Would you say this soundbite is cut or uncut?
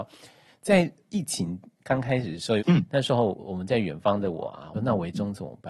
cut